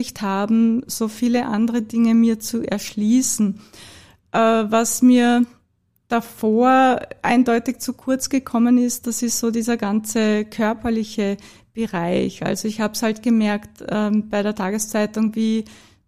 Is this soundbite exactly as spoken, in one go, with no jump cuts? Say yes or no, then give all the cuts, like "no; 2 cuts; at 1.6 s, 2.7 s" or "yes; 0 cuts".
yes; 0 cuts